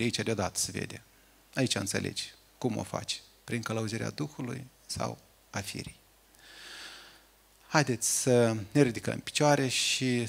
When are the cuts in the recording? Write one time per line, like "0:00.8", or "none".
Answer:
none